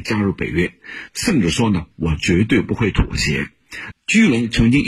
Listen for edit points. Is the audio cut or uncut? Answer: cut